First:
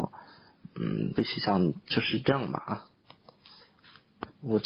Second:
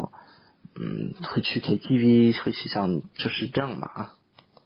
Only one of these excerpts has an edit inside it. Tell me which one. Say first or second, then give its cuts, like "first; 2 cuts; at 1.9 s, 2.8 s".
first; 1 cut; at 1.2 s